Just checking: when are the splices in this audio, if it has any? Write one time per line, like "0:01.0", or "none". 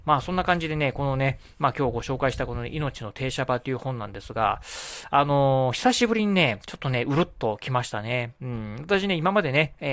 none

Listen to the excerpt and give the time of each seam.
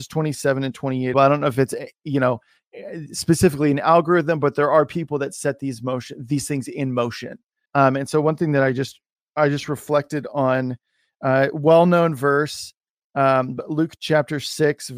0:01.1
0:07.7

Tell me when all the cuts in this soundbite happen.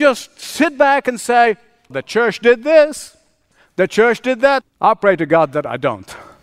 0:01.9
0:04.6

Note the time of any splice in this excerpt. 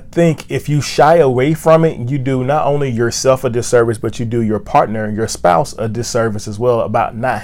none

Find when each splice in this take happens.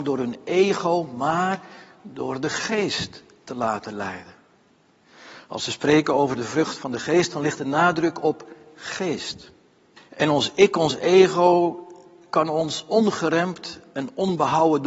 0:10.0

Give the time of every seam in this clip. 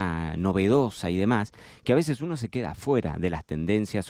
none

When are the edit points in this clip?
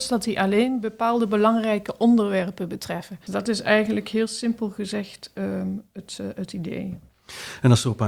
0:03.3

